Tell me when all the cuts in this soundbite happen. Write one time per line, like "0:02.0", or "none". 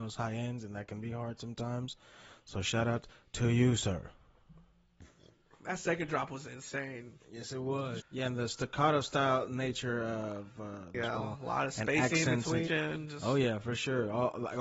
0:08.0
0:10.9
0:12.7